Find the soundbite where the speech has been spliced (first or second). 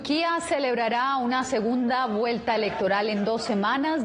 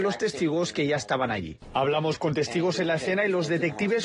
second